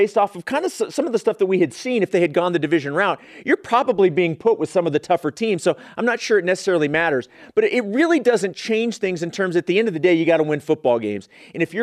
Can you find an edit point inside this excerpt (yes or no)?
no